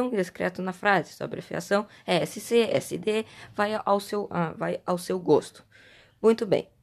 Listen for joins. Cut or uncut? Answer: uncut